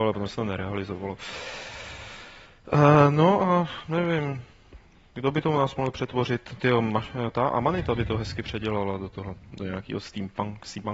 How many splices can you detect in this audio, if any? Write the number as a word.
zero